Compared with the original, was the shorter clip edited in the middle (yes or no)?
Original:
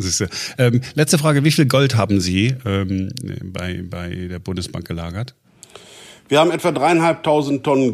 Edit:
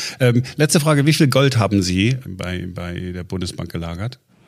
yes